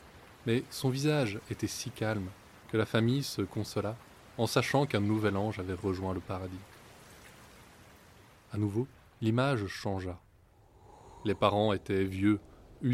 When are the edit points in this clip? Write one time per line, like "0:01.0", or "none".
0:02.6